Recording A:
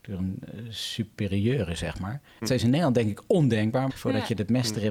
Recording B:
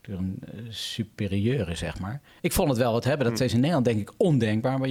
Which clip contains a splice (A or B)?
A